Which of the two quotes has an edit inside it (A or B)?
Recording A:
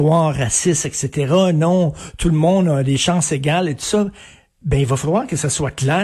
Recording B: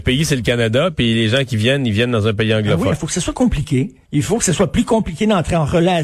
B